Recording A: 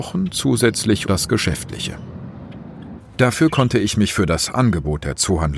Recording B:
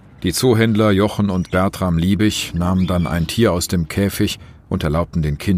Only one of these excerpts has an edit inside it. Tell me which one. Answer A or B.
A